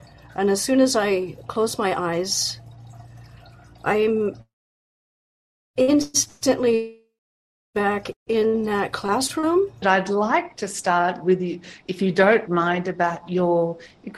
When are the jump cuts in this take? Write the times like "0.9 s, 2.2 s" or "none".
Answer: 9.8 s